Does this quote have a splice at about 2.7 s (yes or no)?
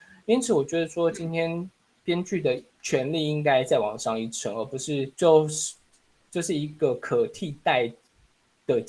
yes